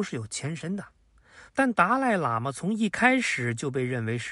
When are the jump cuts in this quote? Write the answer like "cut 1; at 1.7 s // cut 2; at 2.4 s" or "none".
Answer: cut 1; at 1.5 s